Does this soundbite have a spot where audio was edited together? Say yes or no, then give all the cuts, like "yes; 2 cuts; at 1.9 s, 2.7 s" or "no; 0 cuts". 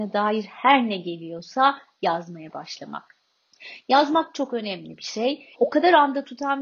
yes; 1 cut; at 5.5 s